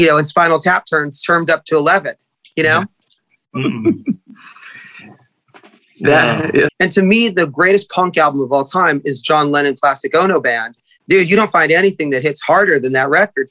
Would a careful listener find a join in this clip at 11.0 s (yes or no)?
yes